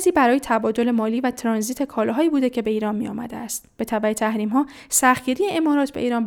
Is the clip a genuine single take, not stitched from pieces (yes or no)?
yes